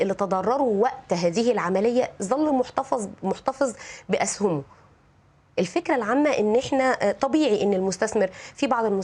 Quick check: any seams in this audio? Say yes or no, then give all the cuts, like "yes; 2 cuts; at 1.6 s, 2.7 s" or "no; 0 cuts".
no; 0 cuts